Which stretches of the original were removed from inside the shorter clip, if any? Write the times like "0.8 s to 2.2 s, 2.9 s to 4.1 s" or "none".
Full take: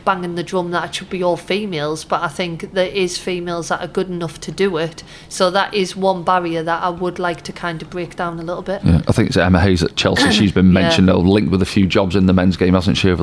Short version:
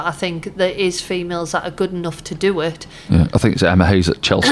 5.2 s to 8.8 s